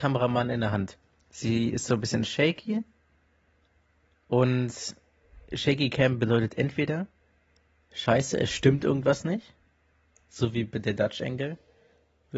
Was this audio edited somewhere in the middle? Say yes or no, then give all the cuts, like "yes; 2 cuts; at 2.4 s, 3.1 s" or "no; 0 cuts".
no; 0 cuts